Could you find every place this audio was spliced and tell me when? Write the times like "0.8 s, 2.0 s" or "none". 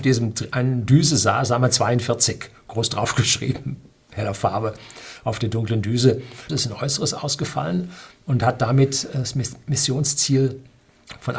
6.5 s